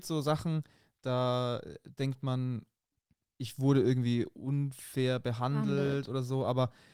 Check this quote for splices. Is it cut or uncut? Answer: uncut